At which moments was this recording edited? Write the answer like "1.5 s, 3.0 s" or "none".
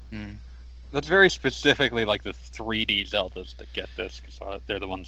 none